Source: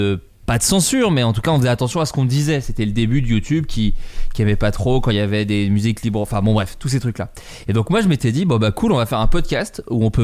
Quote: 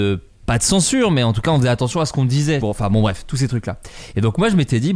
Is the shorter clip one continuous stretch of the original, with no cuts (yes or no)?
no